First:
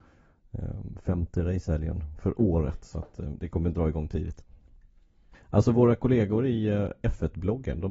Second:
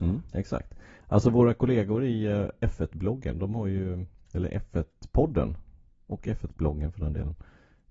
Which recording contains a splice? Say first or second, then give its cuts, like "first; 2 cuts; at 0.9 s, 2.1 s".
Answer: first; 1 cut; at 5.3 s